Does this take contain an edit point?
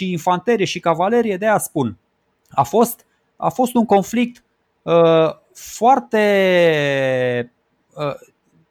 no; 0 cuts

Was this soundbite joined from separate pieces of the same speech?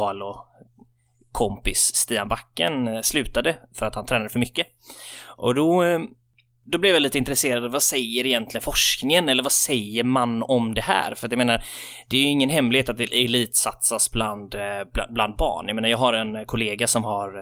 no; 0 cuts

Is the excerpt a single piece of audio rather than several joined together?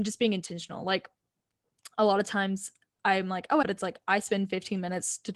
no; 1 cut; at 3.6 s

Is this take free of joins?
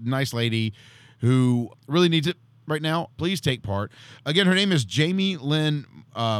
no; 2 cuts; at 1.7 s, 3.1 s

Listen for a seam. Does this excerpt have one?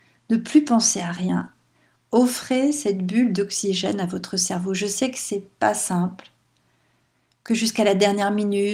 no; 0 cuts

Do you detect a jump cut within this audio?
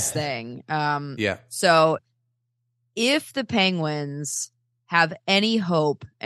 no; 0 cuts

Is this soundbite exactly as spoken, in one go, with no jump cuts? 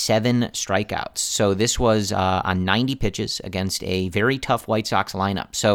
yes; 0 cuts

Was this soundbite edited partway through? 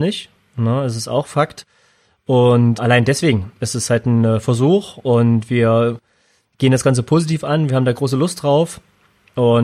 no; 0 cuts

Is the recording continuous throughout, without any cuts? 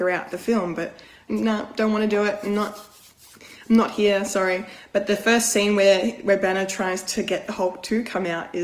no; 1 cut; at 1.3 s

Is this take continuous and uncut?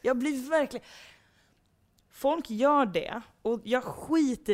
yes; 0 cuts

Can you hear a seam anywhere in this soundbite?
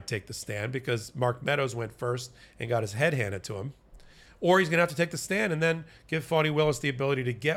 no; 0 cuts

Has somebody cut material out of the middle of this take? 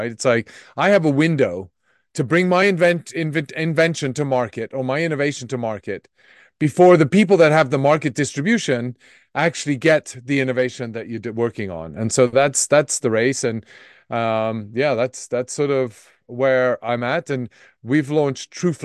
no; 0 cuts

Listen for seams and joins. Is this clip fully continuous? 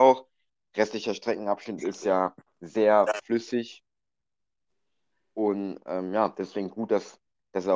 yes; 0 cuts

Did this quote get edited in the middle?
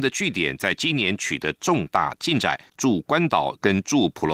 yes; 1 cut; at 2.7 s

